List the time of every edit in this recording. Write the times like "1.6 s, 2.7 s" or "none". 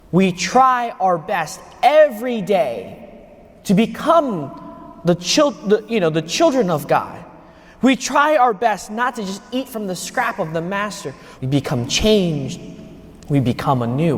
11.4 s